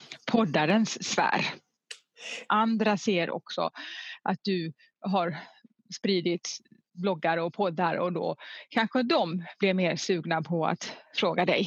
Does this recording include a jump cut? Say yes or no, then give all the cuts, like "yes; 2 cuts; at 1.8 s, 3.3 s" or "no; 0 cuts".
yes; 1 cut; at 2.5 s